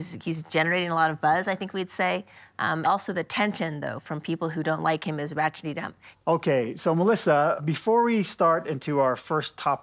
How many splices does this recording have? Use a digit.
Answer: 2